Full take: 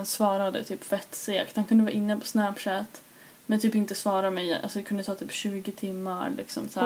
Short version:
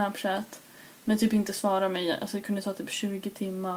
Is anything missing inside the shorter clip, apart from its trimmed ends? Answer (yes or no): no